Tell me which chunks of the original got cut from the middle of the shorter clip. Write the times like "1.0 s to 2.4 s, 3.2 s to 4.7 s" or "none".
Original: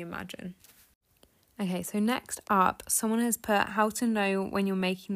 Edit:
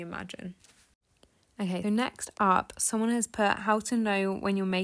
1.8 s to 1.9 s